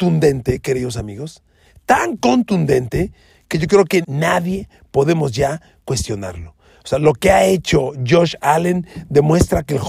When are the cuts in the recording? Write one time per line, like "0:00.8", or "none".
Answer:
0:04.0